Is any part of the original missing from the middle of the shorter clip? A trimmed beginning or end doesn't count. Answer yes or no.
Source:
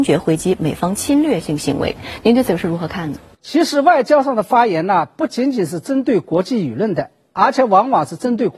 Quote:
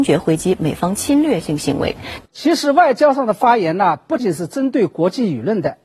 yes